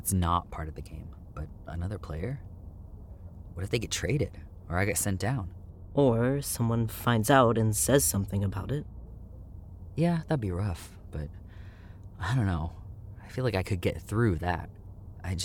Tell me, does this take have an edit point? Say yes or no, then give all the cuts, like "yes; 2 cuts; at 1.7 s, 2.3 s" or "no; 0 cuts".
no; 0 cuts